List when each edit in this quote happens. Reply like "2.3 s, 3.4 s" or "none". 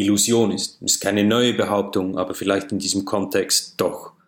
none